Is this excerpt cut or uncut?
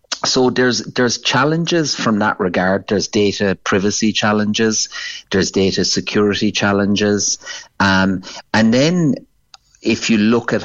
uncut